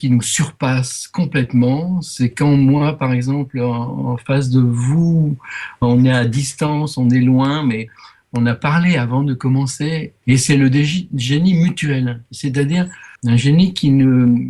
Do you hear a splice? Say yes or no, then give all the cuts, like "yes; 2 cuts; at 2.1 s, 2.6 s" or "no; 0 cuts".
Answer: yes; 2 cuts; at 10.2 s, 13.2 s